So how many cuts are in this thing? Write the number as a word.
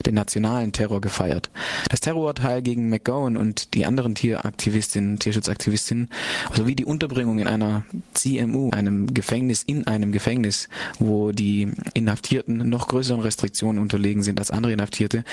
two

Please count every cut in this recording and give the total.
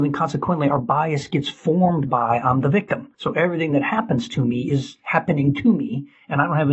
one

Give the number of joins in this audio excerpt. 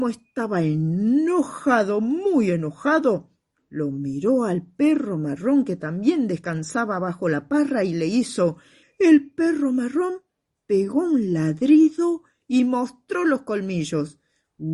one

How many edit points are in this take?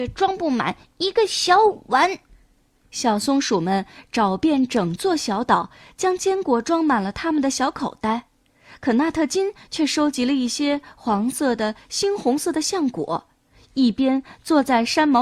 zero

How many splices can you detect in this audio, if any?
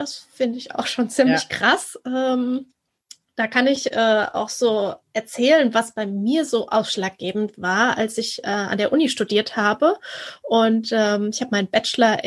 zero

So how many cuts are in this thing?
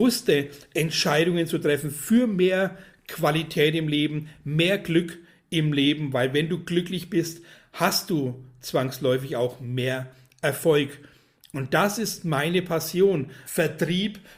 one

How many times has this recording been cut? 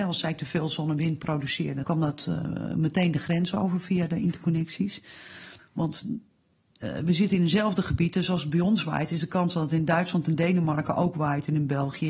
two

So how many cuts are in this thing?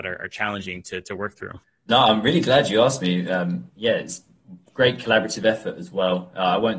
one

